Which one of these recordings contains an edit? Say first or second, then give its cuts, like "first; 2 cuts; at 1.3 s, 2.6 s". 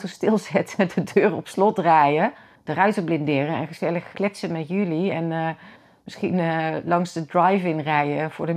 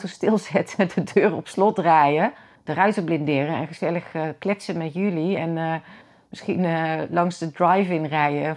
first; 1 cut; at 4.1 s